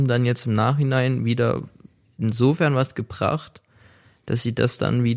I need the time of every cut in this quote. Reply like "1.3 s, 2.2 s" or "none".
none